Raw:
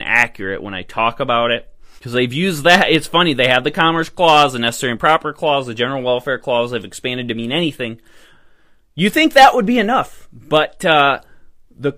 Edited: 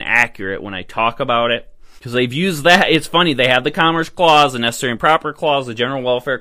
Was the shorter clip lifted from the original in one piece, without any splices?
yes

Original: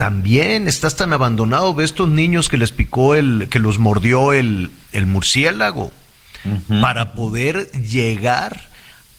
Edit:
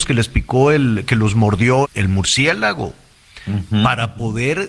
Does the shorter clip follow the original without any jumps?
no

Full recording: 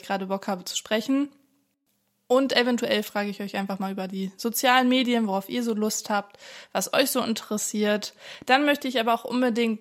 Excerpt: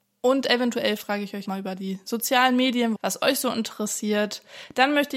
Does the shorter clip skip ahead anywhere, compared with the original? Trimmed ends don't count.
yes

